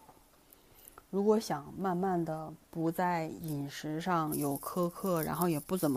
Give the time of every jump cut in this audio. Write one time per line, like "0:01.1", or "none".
0:02.6